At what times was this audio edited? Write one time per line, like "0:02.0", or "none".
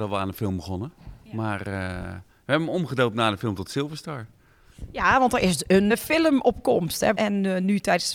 0:05.9
0:07.2